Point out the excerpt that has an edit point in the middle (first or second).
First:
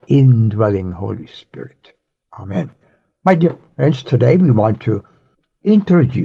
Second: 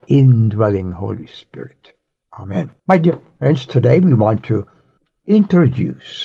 second